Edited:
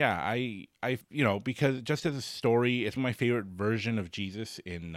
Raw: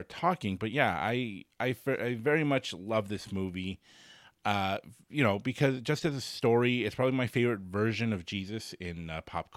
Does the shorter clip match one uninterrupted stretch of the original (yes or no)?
no